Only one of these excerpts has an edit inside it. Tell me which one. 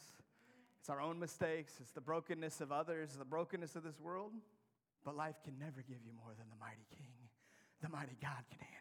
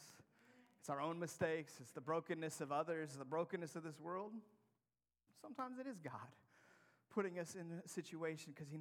first; 1 cut; at 4.9 s

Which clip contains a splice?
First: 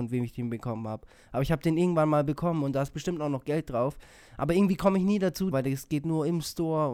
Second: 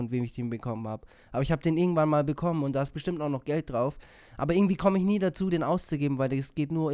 first; 1 cut; at 5.5 s

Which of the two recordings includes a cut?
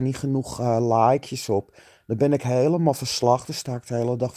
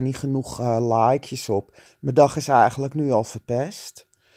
second; 1 cut; at 1.9 s

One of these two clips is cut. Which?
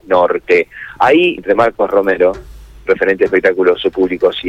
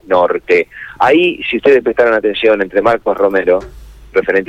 first; 1 cut; at 1.4 s

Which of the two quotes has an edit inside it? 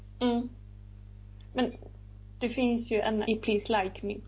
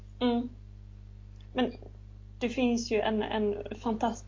first; 1 cut; at 3.2 s

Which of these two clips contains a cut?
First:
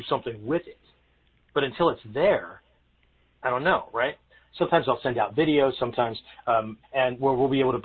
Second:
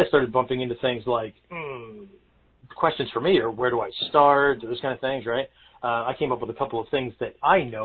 first; 2 cuts; at 4.6 s, 6.8 s

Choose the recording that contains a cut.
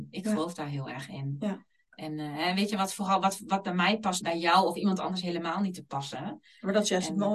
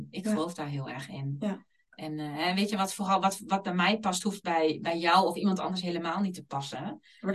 first; 1 cut; at 4.2 s

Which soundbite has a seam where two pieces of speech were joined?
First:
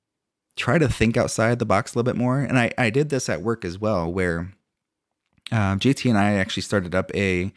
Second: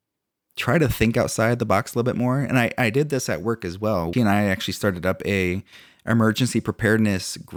second; 1 cut; at 4.1 s

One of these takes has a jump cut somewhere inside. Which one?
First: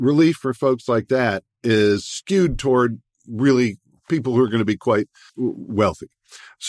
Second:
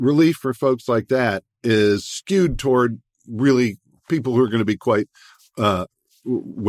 first; 1 cut; at 5.3 s

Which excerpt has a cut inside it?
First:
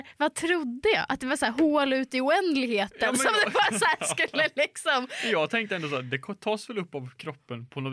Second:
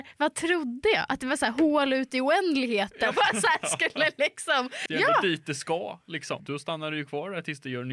second; 3 cuts; at 3.1 s, 4.9 s, 6.4 s

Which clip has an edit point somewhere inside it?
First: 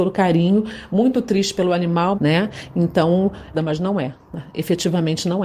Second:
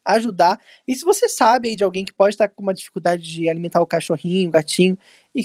first; 2 cuts; at 2.1 s, 3.5 s

